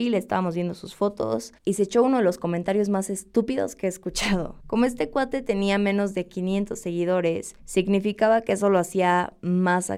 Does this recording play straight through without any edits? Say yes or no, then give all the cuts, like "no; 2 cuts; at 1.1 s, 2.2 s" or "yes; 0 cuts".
yes; 0 cuts